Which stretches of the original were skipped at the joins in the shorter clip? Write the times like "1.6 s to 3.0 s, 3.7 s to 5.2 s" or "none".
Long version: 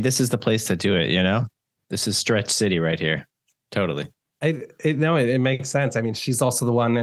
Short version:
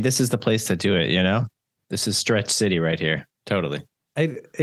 3.4 s to 3.6 s